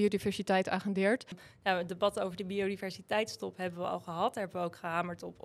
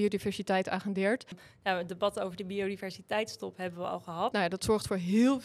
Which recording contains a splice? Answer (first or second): second